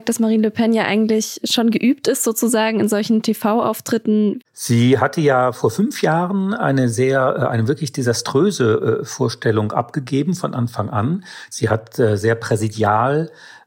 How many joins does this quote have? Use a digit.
2